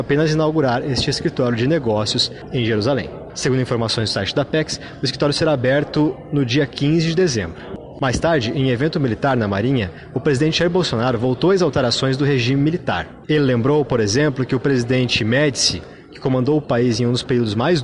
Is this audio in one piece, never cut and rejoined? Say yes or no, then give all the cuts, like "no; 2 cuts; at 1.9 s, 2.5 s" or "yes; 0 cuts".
yes; 0 cuts